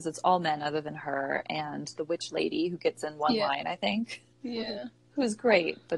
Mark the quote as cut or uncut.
uncut